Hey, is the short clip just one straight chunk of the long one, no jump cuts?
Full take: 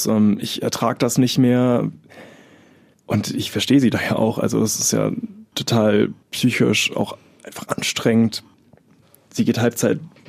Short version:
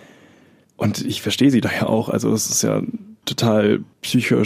yes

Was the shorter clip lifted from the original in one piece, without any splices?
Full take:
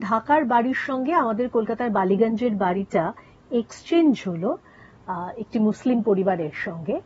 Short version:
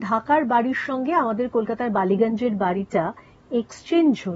yes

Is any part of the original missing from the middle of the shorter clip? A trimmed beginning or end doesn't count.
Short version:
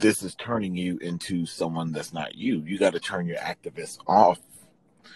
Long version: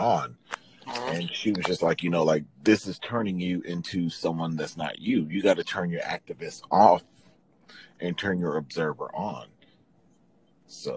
no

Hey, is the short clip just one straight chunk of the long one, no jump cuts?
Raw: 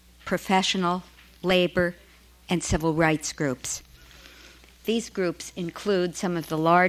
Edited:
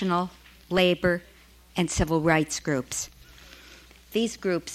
yes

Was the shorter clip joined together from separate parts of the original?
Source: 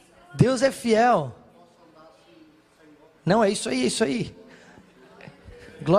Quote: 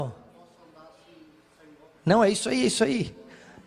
no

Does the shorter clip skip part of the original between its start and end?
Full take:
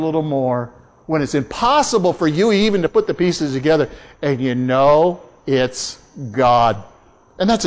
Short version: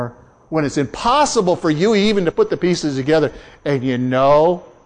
no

